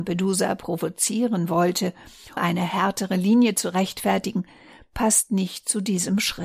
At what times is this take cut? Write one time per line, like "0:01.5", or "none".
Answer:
0:02.4